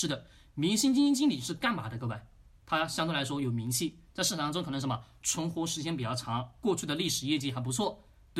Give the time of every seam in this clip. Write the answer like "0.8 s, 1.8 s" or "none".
none